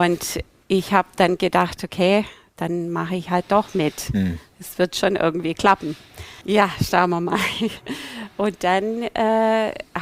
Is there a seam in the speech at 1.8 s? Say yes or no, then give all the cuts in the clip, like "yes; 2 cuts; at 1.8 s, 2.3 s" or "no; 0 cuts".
no; 1 cut; at 6.4 s